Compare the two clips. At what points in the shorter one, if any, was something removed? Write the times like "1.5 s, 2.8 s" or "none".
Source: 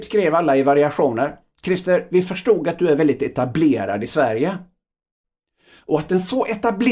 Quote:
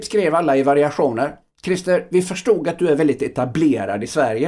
none